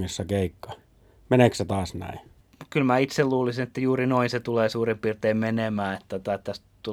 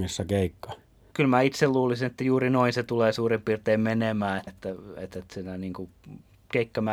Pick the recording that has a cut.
second; 2 cuts; at 1.1 s, 4.5 s

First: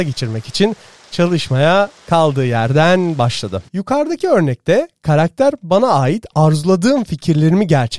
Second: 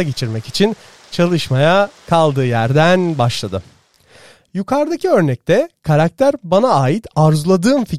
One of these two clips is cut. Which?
first; 1 cut; at 3.7 s

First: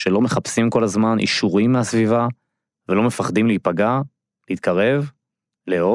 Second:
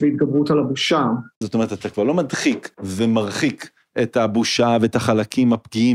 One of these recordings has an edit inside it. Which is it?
second; 2 cuts; at 1.4 s, 2.7 s

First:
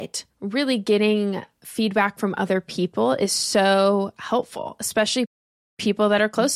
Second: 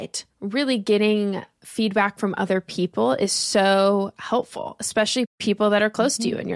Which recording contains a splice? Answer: second; 1 cut; at 5.3 s

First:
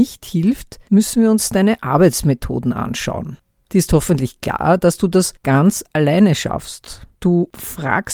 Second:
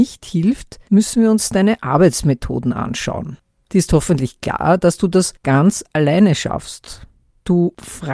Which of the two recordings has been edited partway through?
first; 1 cut; at 7.1 s

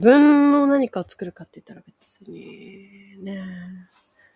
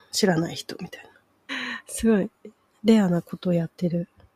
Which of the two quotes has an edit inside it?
second; 2 cuts; at 1.5 s, 2.7 s

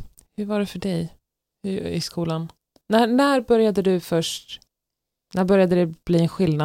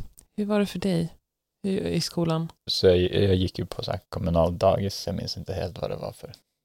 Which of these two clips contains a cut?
second; 3 cuts; at 2.7 s, 4.0 s, 5.1 s

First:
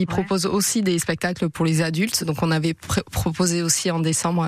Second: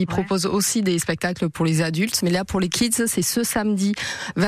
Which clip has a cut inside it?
second; 1 cut; at 2.2 s

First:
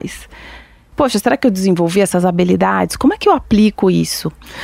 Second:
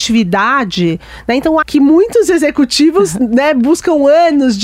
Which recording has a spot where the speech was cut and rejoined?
second; 1 cut; at 1.6 s

